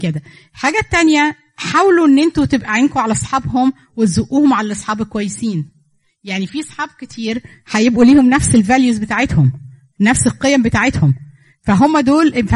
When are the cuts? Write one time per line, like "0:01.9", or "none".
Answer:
none